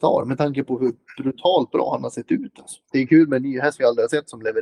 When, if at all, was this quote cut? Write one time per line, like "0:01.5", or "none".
0:02.9